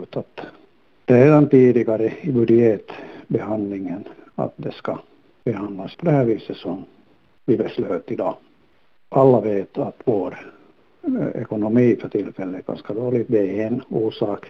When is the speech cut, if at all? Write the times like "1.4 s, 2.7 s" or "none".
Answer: 5.9 s